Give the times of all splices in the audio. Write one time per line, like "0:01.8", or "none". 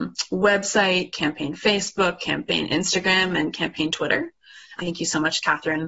0:04.8